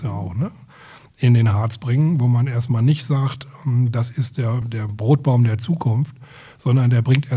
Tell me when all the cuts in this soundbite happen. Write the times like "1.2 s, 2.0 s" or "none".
4.6 s